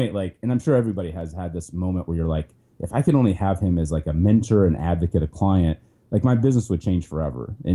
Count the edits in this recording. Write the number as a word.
zero